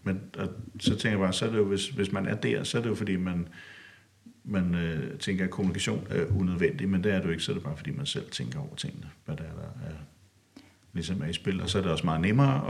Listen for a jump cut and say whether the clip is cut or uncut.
uncut